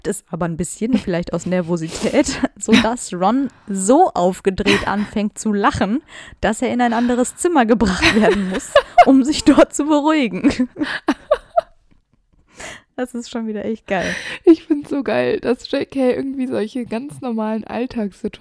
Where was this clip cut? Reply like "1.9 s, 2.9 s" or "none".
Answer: none